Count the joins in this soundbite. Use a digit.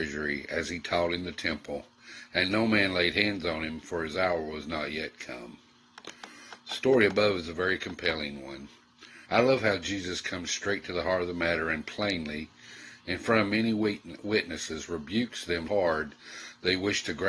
2